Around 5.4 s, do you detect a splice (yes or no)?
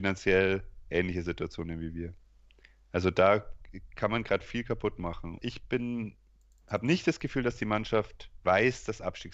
yes